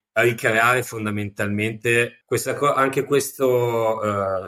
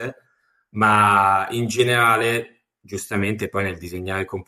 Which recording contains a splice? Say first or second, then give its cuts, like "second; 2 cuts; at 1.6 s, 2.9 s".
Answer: first; 1 cut; at 2.2 s